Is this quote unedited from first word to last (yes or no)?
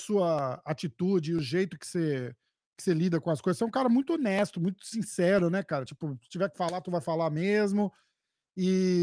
yes